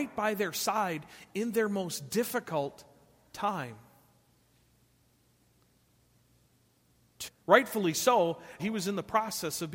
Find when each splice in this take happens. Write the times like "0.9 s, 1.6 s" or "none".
7.3 s, 8.6 s